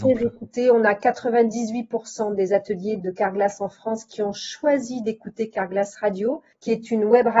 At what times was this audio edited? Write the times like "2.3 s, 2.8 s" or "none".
3.0 s